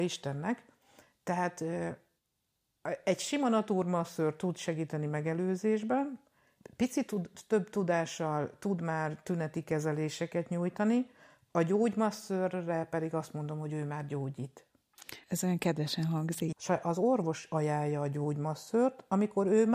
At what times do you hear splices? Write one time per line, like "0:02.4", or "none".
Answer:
0:15.2
0:16.5